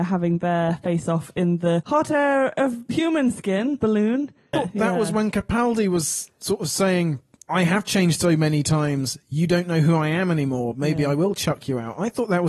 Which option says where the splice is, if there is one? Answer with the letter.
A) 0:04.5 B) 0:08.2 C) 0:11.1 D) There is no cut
A